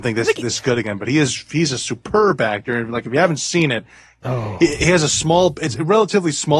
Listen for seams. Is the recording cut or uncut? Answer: cut